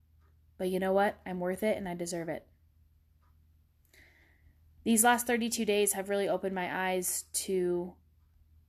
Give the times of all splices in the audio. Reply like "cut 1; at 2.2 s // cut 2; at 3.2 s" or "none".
none

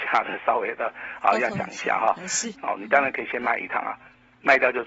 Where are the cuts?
cut 1; at 2.5 s

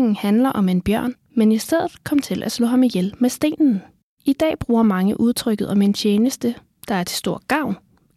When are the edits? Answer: cut 1; at 1.2 s // cut 2; at 4.2 s

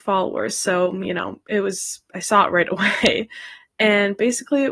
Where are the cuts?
none

